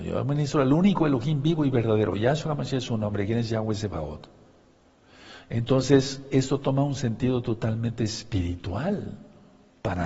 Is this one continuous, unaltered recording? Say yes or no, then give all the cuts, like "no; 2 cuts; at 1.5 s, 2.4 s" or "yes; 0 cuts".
yes; 0 cuts